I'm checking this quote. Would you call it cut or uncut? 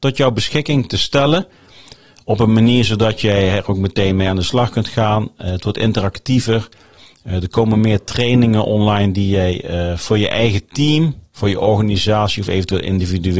uncut